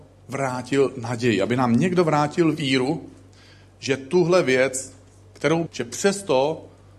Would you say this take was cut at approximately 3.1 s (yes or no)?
no